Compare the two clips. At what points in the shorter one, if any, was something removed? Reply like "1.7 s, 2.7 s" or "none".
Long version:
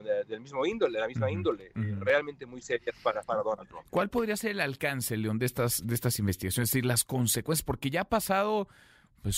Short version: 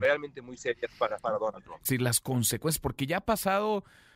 1.9 s